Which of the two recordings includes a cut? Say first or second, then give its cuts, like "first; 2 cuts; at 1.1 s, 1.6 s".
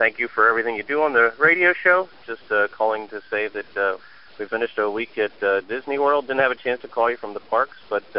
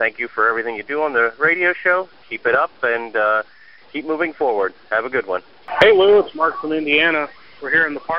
first; 2 cuts; at 2.3 s, 4.5 s